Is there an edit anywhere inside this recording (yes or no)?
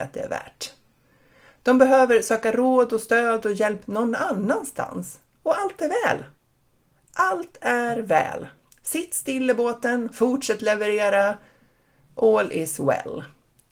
yes